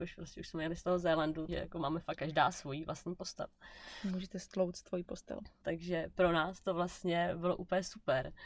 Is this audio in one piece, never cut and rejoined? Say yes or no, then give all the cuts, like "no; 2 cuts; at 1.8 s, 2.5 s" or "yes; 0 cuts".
no; 2 cuts; at 1.5 s, 5.6 s